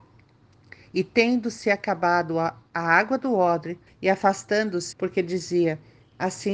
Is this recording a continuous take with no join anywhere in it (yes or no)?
no